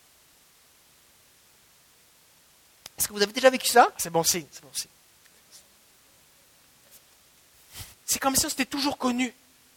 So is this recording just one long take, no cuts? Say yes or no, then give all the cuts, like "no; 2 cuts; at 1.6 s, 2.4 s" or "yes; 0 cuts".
no; 2 cuts; at 3.9 s, 7.9 s